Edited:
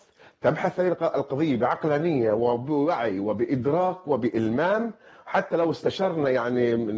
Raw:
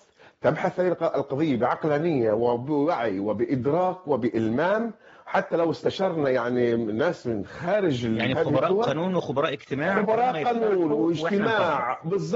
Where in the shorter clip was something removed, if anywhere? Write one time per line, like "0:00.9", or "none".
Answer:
none